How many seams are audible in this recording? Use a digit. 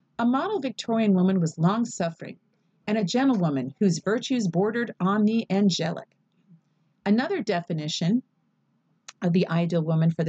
0